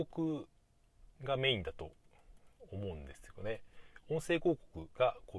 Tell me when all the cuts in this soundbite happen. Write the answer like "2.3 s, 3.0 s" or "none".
1.2 s